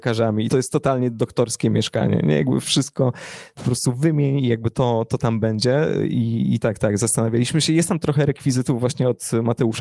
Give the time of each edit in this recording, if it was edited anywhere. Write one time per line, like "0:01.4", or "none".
0:06.6